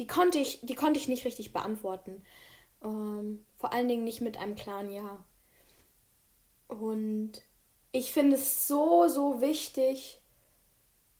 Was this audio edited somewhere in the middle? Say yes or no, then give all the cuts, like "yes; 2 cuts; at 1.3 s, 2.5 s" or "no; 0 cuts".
no; 0 cuts